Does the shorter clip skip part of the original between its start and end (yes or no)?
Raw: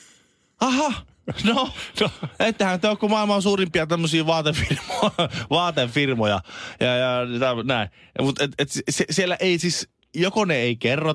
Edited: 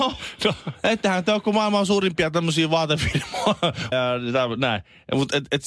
yes